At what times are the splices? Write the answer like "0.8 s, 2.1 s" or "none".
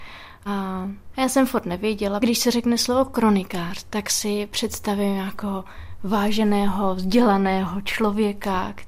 2.2 s